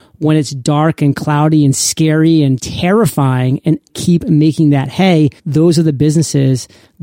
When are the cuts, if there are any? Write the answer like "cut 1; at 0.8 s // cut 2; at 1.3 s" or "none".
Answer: cut 1; at 2.6 s // cut 2; at 3.9 s // cut 3; at 5.4 s